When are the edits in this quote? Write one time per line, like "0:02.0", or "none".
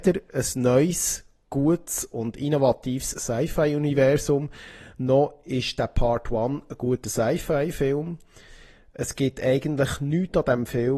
none